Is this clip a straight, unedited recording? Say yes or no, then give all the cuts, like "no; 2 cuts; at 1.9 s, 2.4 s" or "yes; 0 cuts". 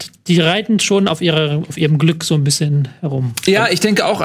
yes; 0 cuts